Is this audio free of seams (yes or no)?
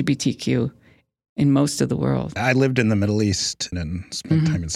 no